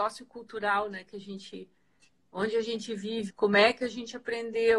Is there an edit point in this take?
yes; 1 cut; at 3.3 s

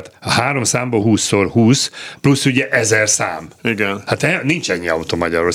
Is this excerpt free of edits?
no; 1 cut; at 1.0 s

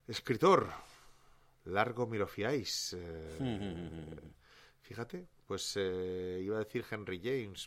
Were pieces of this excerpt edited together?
yes; 1 cut; at 1.5 s

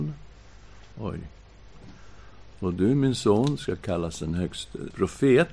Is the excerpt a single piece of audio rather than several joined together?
no; 2 cuts; at 0.9 s, 2.5 s

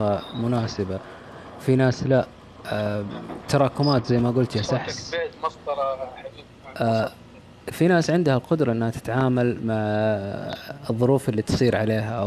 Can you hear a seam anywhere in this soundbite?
yes; 1 cut; at 7.7 s

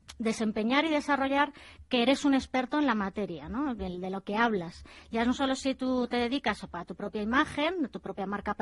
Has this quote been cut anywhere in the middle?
no; 0 cuts

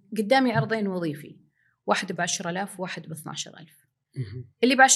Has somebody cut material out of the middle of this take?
no; 0 cuts

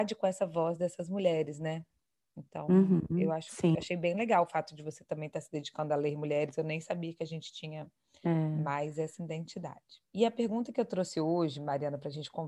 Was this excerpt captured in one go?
no; 1 cut; at 10.0 s

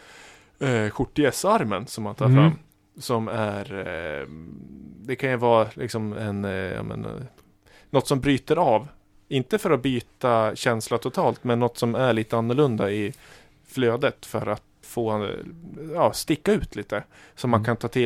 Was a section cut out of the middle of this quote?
yes; 1 cut; at 14.8 s

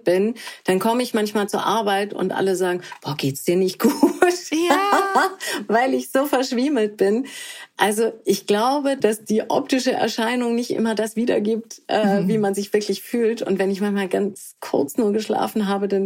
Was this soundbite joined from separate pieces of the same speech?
no; 0 cuts

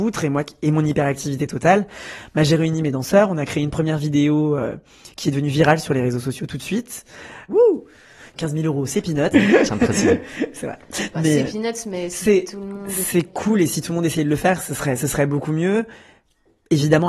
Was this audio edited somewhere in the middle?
yes; 2 cuts; at 7.5 s, 9.3 s

